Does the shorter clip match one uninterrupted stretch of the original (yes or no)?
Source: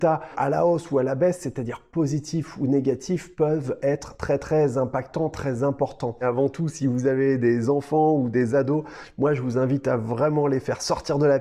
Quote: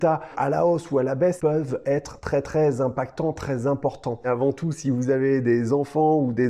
no